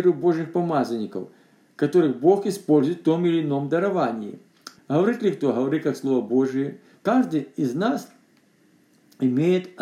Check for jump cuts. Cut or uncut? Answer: cut